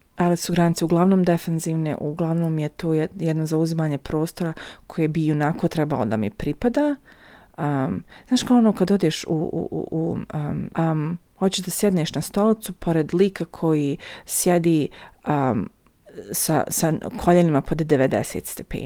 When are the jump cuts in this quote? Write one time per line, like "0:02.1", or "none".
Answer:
0:10.7